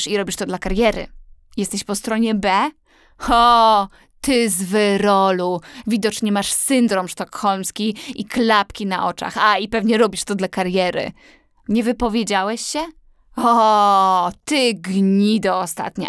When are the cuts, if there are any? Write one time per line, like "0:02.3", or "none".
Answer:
none